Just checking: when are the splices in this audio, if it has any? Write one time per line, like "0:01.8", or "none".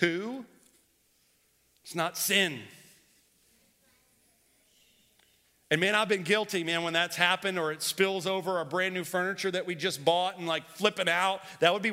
none

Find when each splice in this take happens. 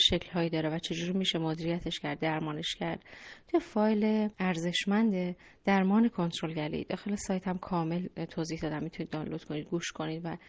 0:04.3

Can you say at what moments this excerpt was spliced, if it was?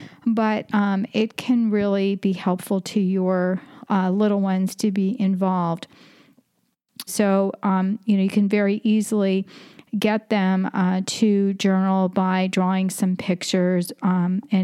0:07.1

